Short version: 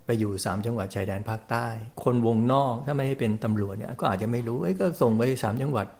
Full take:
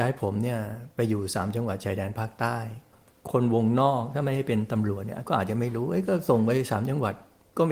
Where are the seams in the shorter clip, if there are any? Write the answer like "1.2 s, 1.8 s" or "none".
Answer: 1.9 s